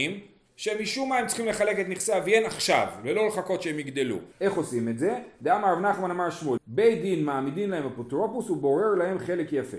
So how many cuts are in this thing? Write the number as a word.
two